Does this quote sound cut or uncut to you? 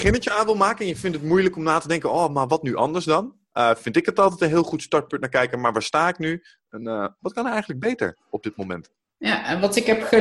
uncut